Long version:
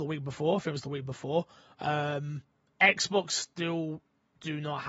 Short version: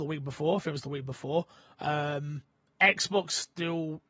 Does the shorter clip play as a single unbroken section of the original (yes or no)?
yes